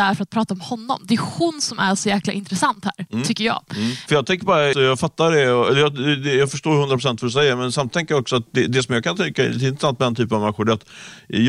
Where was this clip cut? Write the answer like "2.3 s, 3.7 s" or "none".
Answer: 4.7 s